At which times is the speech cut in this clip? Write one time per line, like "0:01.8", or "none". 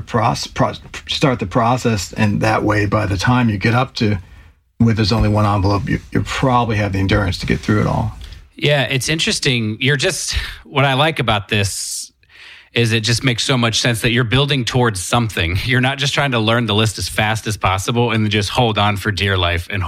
none